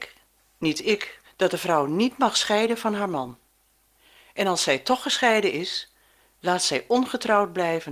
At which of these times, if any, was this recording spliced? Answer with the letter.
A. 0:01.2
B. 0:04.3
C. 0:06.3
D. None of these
A